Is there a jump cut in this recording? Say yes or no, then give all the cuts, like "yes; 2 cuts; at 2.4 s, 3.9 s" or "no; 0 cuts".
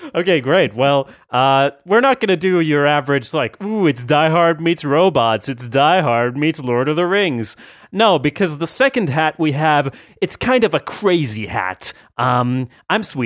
no; 0 cuts